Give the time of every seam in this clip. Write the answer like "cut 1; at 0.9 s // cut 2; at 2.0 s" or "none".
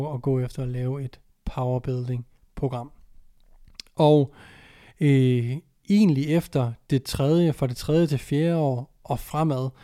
none